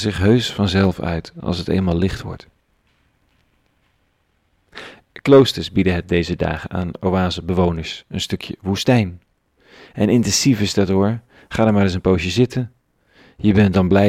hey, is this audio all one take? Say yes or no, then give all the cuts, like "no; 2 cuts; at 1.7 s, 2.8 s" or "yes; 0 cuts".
yes; 0 cuts